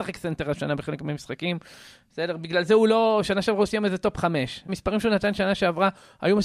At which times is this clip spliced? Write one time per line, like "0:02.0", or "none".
0:04.7